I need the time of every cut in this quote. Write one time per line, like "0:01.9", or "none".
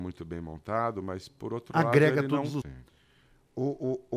0:02.6